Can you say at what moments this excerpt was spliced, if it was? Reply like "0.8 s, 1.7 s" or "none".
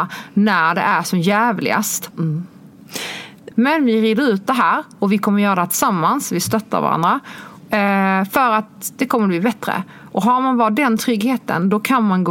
2.1 s, 3.5 s